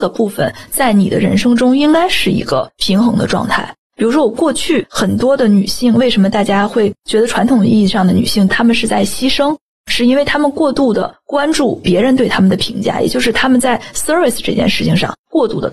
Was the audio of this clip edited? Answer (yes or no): no